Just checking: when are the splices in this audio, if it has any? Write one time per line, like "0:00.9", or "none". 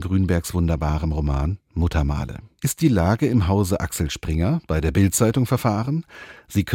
0:02.6